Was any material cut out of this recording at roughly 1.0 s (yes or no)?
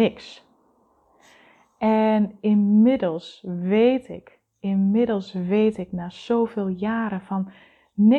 no